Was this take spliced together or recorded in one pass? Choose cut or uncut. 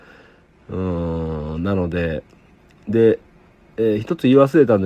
uncut